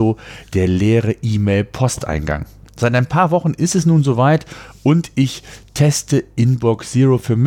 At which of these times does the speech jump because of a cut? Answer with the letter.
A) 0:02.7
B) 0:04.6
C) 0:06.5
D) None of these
D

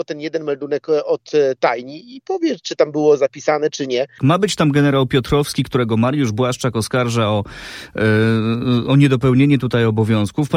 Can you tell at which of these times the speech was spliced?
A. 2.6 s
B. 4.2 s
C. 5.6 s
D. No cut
B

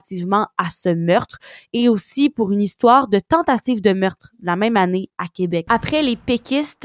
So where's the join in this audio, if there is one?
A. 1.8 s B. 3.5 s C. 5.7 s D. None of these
C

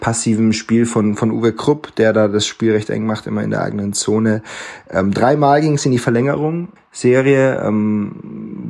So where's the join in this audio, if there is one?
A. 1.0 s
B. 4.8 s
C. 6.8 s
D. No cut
C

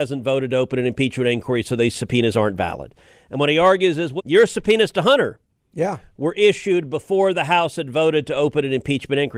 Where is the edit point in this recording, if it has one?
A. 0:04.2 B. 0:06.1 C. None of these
A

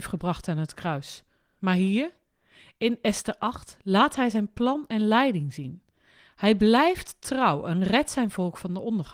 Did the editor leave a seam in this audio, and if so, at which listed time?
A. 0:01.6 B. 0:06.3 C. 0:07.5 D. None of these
A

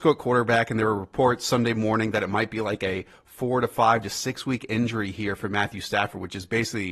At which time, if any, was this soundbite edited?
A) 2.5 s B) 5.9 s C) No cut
C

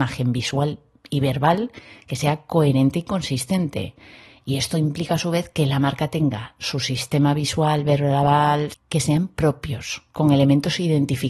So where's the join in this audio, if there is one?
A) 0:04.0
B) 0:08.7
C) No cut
B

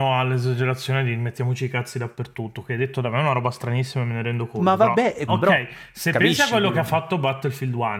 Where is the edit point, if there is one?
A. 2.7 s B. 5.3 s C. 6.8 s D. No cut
B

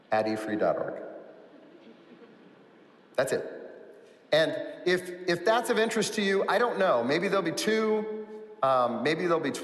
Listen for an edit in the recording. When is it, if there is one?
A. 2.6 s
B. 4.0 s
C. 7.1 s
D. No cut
D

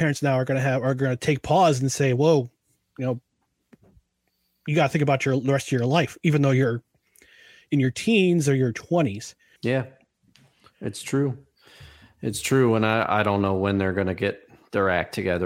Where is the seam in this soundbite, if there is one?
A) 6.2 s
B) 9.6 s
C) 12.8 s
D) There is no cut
B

